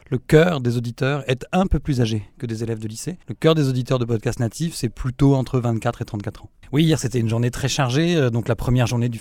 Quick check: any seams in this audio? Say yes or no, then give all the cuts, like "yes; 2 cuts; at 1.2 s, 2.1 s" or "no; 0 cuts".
yes; 2 cuts; at 3.2 s, 6.6 s